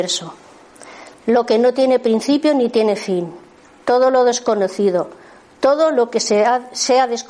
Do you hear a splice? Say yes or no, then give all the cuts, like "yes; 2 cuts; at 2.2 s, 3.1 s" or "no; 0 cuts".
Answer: yes; 1 cut; at 1.1 s